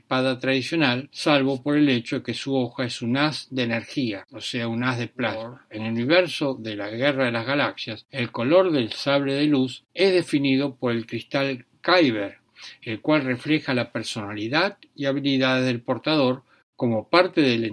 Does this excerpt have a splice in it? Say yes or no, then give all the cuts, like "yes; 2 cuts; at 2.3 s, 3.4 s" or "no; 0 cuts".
no; 0 cuts